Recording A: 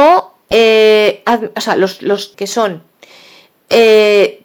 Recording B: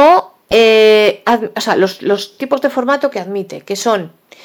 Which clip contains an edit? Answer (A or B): A